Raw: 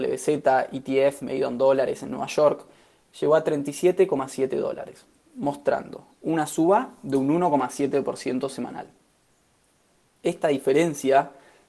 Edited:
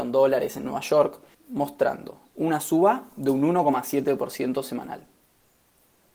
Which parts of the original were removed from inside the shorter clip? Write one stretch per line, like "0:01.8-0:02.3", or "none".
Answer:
0:02.8-0:05.2